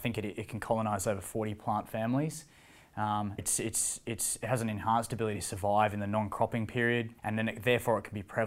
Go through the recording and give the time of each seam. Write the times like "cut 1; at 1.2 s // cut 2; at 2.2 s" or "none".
cut 1; at 3.4 s // cut 2; at 7.2 s